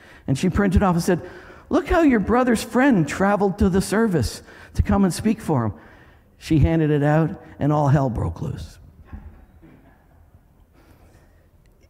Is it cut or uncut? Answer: uncut